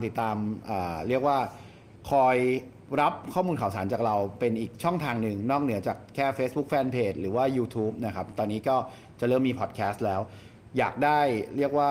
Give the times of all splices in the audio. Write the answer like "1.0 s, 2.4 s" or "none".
10.7 s